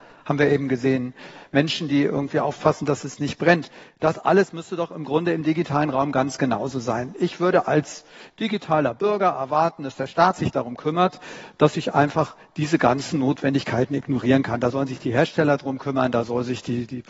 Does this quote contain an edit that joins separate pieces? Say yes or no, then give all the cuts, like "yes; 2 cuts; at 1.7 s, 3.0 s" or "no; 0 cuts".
no; 0 cuts